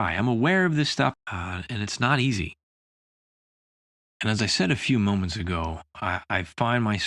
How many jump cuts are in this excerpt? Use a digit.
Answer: 1